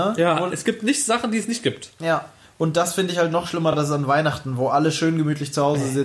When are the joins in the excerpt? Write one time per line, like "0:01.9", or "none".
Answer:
none